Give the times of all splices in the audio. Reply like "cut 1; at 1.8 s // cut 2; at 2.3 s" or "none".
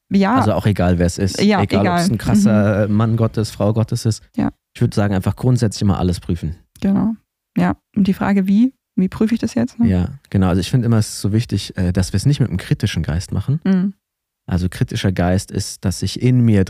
none